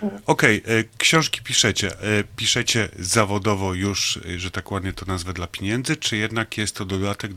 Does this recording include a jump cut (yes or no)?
no